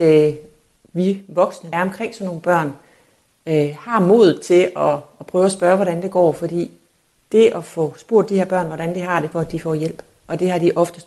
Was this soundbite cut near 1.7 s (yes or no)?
yes